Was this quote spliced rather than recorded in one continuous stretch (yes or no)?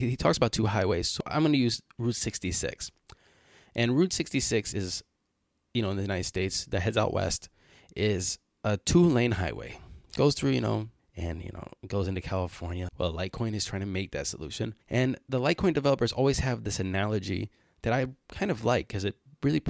yes